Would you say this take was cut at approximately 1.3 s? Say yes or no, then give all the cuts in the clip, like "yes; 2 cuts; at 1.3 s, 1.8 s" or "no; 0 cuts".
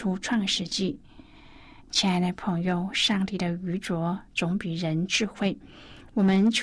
no; 0 cuts